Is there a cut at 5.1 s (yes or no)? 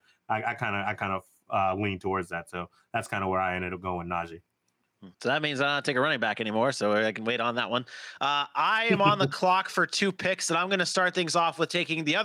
yes